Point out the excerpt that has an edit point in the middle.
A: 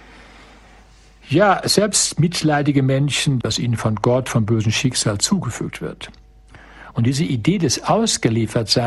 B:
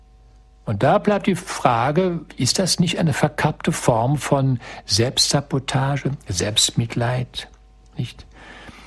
A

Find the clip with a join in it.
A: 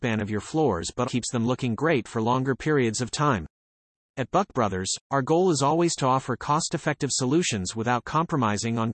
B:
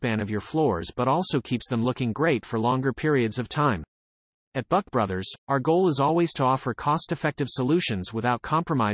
A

